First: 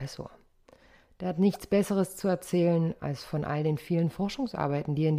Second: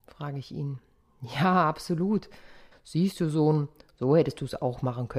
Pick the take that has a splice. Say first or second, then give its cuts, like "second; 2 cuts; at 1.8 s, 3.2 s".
second; 1 cut; at 2.7 s